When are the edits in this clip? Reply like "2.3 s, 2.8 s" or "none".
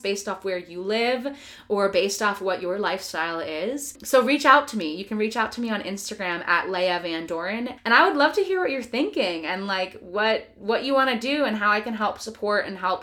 7.8 s

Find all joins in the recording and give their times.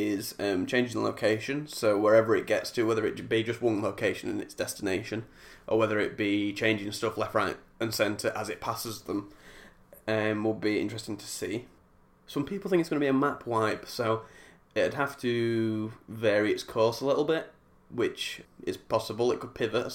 18.4 s

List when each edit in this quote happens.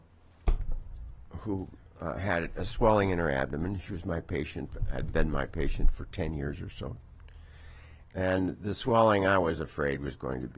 8.0 s

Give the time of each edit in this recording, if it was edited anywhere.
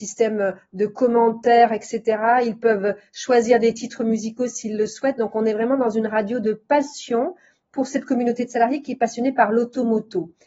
none

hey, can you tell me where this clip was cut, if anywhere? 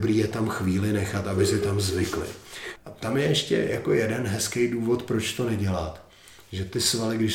2.8 s

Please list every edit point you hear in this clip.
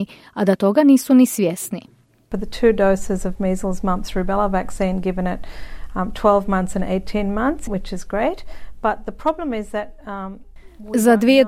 7.7 s

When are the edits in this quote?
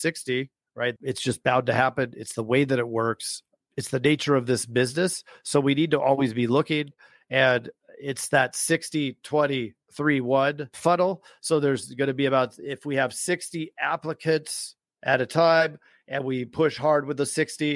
1.0 s

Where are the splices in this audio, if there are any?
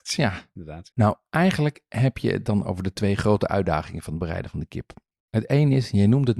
0.9 s

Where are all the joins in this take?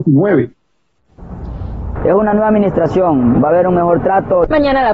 2.0 s, 3.3 s

